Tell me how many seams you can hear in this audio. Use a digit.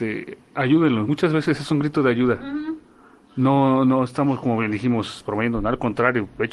0